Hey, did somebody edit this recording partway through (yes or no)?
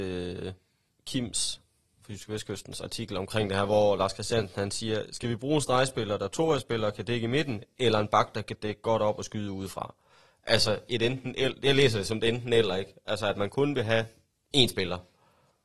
no